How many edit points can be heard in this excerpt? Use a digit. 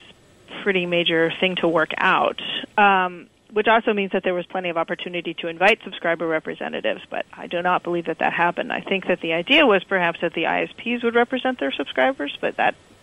0